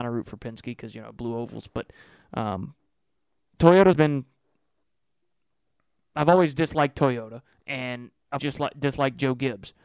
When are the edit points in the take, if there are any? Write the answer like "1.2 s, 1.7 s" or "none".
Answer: 3.9 s, 8.4 s